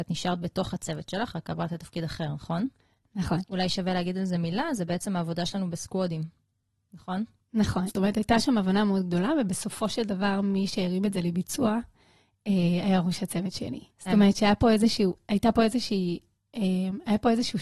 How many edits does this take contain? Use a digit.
2